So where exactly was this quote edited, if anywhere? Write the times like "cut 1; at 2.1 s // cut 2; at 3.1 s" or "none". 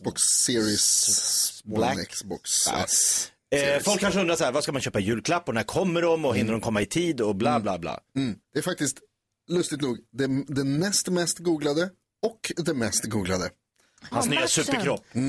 cut 1; at 8.4 s // cut 2; at 14.1 s

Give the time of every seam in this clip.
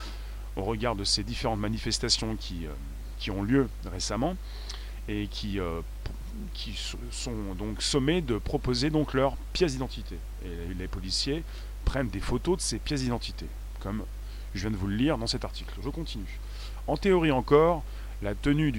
none

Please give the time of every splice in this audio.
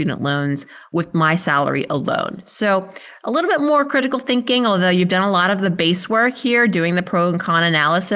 none

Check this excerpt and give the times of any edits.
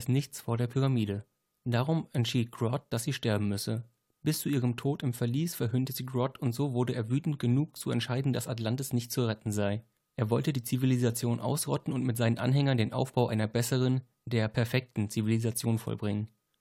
none

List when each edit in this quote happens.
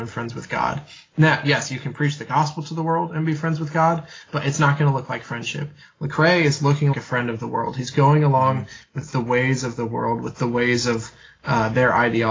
cut 1; at 6.9 s

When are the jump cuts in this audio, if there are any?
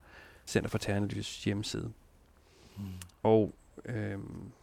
none

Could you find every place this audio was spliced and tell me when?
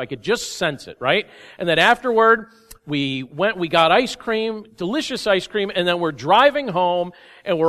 none

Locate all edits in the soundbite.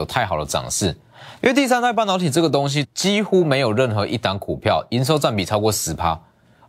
cut 1; at 1.4 s // cut 2; at 2.8 s

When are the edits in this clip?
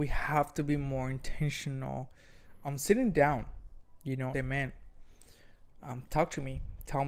cut 1; at 4.3 s

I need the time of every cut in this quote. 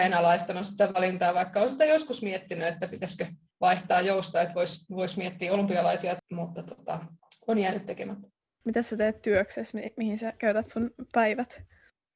none

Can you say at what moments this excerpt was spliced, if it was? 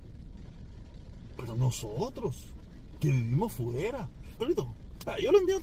cut 1; at 1.4 s // cut 2; at 4.4 s

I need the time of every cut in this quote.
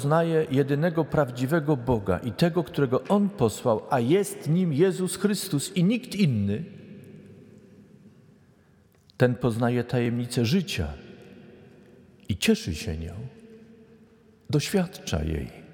none

